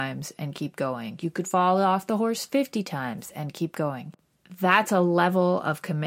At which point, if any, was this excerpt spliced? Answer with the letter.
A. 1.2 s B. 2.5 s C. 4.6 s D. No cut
D